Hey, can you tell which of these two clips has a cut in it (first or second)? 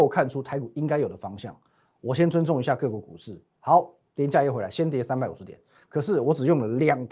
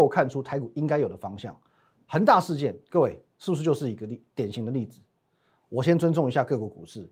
first